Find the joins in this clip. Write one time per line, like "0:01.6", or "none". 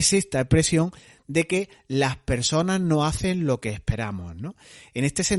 none